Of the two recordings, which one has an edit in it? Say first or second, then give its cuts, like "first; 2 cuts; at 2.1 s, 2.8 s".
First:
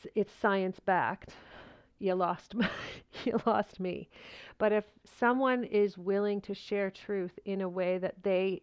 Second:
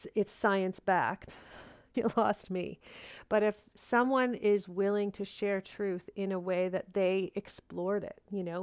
second; 1 cut; at 1.9 s